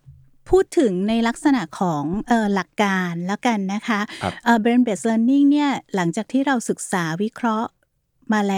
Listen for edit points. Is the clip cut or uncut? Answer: uncut